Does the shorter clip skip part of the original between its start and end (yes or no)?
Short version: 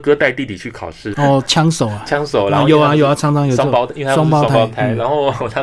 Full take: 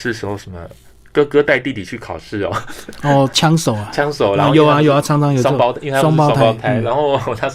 yes